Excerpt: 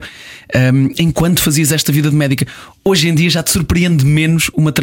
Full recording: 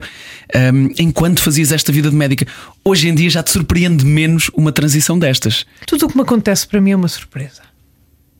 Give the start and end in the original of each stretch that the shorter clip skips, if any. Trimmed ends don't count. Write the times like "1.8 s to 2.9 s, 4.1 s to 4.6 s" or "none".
none